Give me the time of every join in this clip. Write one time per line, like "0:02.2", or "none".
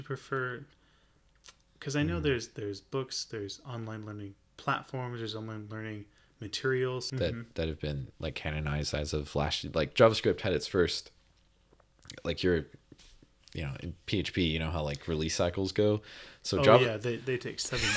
0:07.1